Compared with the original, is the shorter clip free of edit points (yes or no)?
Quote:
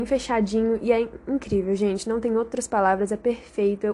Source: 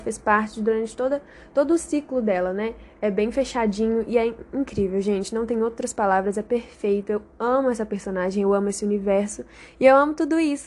yes